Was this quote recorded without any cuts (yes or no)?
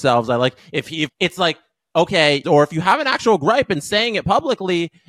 no